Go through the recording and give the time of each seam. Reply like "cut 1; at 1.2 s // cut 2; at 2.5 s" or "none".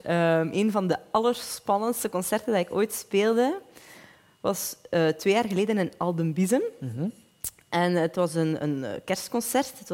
none